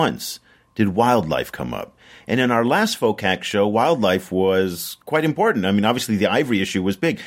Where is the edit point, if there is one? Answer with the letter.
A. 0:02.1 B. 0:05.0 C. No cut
B